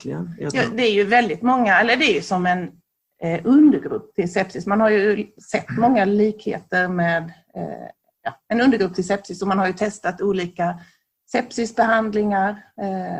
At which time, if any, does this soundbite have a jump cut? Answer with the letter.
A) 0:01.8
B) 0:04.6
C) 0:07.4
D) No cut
D